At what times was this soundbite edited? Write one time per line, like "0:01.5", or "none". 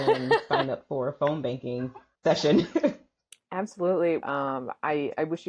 0:04.2